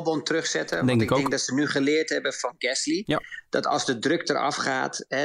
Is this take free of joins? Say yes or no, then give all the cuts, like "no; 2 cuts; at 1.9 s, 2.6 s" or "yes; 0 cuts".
yes; 0 cuts